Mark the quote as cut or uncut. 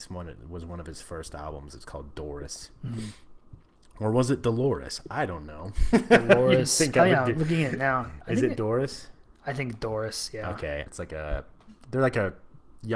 cut